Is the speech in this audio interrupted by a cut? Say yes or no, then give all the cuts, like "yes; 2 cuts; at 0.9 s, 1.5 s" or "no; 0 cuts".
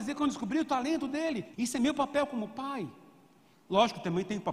yes; 1 cut; at 1.5 s